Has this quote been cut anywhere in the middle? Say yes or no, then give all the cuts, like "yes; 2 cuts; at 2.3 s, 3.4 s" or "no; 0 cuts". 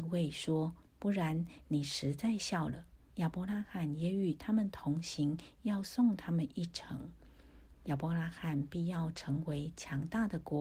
yes; 2 cuts; at 3.1 s, 7.7 s